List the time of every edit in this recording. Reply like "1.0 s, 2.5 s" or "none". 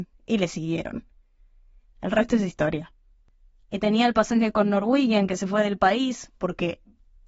none